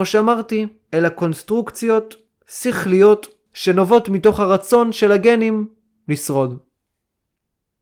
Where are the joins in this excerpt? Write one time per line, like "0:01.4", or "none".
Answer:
0:03.5